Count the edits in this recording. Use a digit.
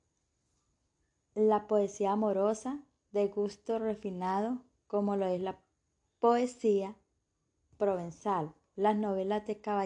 0